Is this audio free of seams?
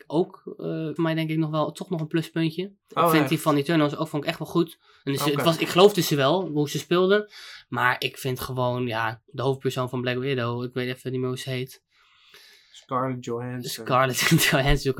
no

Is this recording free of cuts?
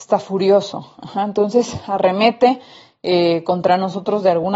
yes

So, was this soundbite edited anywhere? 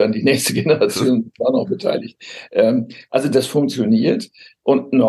no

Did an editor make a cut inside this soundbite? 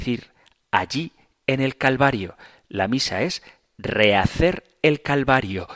no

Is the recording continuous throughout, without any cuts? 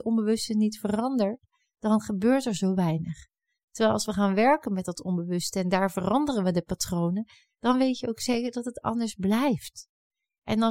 yes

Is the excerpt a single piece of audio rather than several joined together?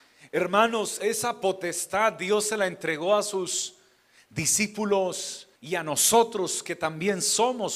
no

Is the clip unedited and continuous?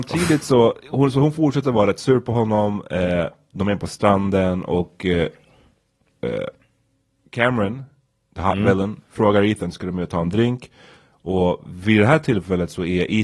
yes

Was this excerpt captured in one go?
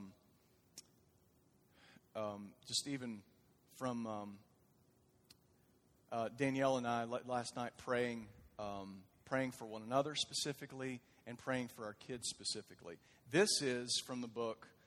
yes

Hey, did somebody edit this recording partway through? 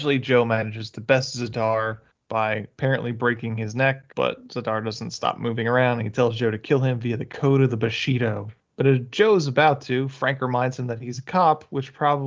yes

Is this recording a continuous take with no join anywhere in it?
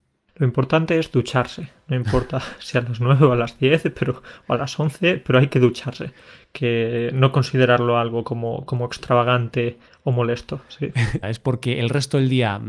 no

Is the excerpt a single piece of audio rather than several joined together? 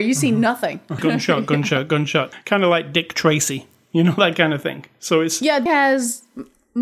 no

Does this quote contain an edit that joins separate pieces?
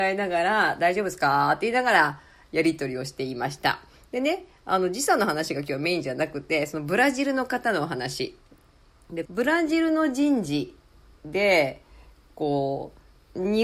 yes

